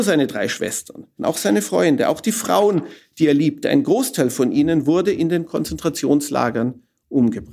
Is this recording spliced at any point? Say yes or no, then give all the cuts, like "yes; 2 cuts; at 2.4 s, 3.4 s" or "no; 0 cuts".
yes; 1 cut; at 1.2 s